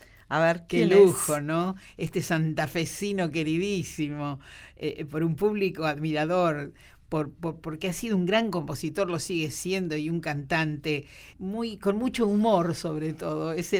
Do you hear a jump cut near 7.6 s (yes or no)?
no